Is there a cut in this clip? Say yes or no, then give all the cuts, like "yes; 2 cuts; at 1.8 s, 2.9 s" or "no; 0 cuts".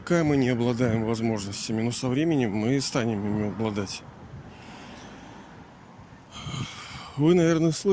no; 0 cuts